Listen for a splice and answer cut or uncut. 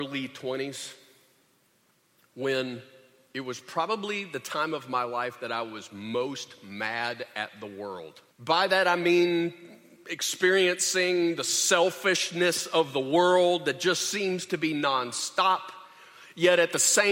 cut